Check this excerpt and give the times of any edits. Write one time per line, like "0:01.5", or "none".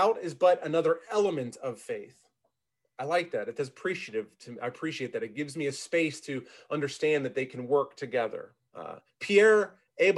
0:08.7